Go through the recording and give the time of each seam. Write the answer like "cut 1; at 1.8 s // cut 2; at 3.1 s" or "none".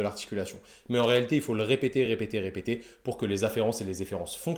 none